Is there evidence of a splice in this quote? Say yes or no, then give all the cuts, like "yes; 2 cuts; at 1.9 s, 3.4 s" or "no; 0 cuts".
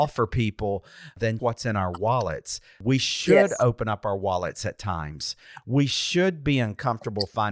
yes; 1 cut; at 1.4 s